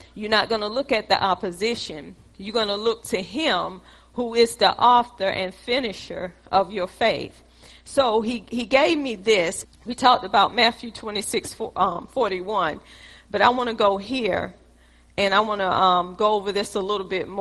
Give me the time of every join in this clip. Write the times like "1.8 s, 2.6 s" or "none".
9.6 s